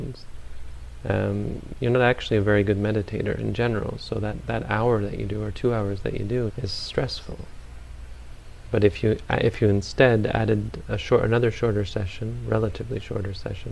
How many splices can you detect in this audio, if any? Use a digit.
1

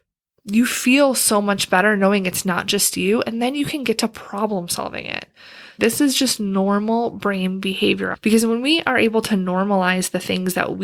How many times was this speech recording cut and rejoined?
2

